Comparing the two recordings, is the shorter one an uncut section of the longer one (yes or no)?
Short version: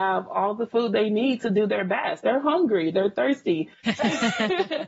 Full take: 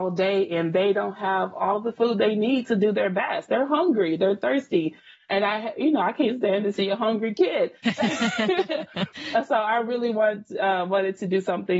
no